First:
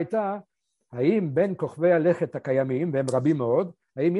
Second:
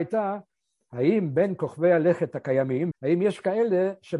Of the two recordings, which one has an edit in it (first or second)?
second